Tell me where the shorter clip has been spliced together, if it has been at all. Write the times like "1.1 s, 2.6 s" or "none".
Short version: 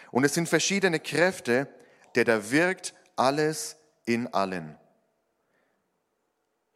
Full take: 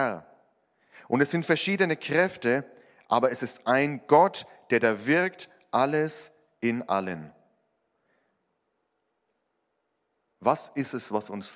2.0 s